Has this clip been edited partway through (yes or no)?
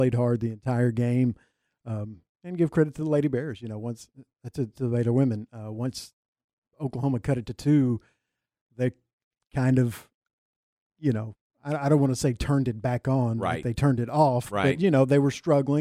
no